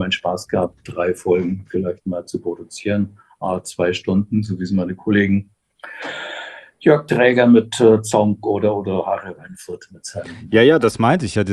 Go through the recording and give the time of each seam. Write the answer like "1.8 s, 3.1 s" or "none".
none